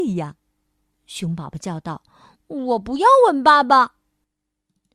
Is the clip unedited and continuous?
no; 1 cut; at 0.9 s

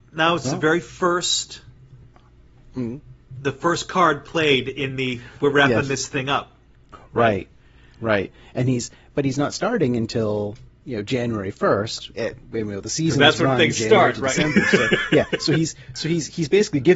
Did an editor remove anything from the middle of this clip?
no; 0 cuts

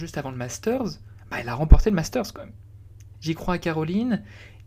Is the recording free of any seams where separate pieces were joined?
no; 1 cut; at 3.1 s

